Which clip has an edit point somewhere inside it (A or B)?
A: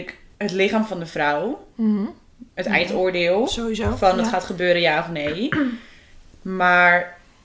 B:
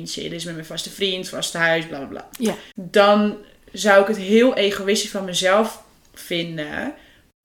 A